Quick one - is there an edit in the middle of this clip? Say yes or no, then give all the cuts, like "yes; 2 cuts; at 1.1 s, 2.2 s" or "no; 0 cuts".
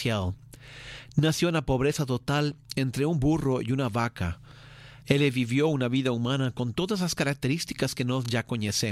yes; 1 cut; at 5.0 s